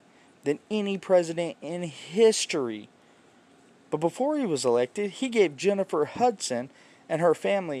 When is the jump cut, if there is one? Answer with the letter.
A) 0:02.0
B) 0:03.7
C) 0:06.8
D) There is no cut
B